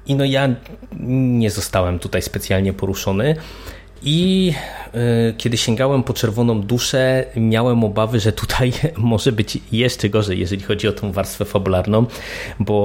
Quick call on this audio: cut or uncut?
uncut